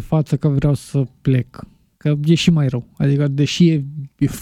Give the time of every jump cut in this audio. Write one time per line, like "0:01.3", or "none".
none